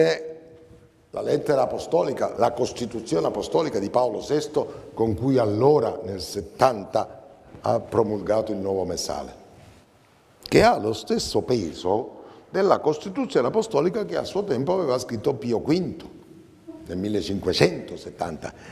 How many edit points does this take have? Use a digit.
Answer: 1